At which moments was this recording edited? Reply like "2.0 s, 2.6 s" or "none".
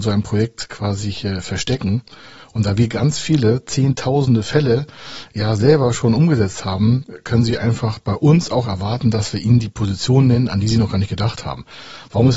none